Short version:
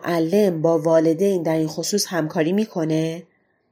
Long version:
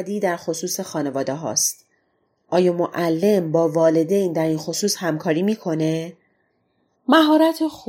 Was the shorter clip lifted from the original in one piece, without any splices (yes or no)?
yes